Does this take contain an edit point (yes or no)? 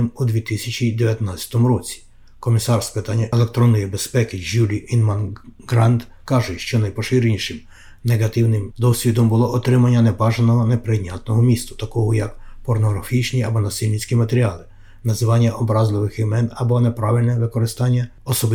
no